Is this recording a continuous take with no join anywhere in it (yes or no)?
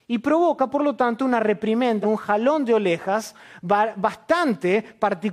no